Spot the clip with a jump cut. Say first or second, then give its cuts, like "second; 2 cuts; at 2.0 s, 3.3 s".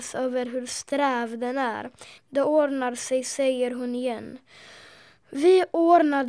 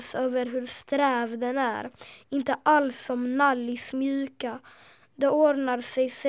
first; 1 cut; at 2.2 s